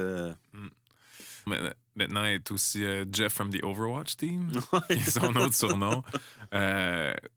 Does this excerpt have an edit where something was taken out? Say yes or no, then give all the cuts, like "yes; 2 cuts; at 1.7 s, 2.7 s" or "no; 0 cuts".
yes; 1 cut; at 1.5 s